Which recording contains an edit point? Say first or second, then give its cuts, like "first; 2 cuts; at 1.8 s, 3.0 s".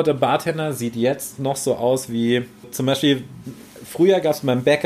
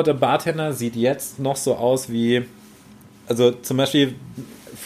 first; 1 cut; at 2.6 s